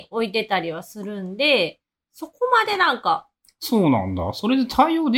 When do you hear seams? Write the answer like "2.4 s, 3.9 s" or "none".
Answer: none